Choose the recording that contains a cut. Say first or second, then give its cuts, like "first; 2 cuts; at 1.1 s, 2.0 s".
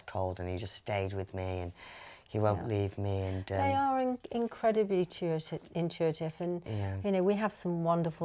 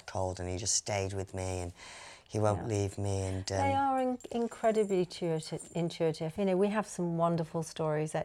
second; 1 cut; at 6.4 s